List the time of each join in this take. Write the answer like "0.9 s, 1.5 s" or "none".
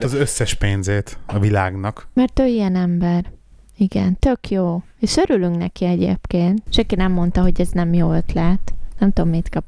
6.7 s